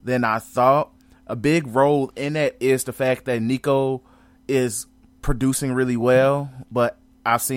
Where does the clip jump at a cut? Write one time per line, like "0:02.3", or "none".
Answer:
none